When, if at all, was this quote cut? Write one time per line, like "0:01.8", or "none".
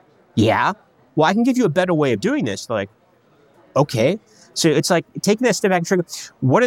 none